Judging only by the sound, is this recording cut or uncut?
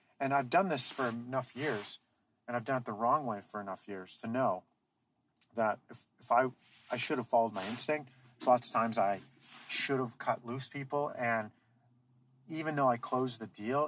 uncut